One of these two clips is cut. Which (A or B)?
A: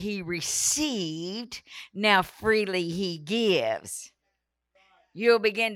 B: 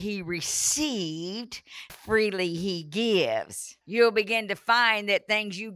B